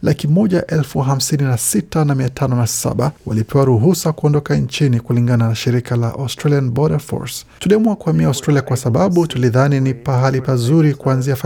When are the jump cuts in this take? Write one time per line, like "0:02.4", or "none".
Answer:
0:03.2
0:07.6